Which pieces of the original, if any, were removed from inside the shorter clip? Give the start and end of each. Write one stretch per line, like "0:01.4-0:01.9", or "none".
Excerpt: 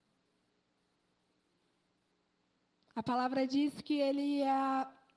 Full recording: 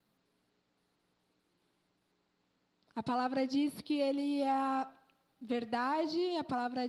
none